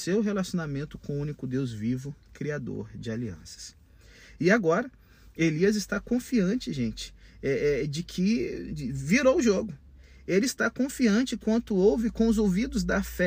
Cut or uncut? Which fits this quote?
uncut